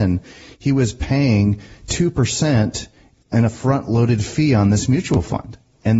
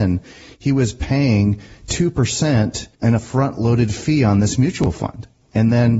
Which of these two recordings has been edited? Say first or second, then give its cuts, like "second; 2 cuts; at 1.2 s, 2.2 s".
second; 1 cut; at 2.9 s